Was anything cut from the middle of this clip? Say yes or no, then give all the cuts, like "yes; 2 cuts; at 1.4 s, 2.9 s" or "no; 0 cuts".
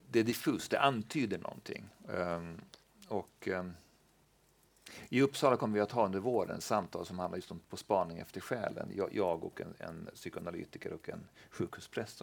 no; 0 cuts